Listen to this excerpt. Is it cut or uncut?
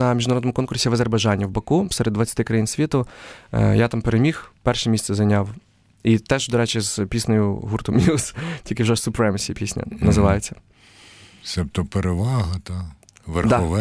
uncut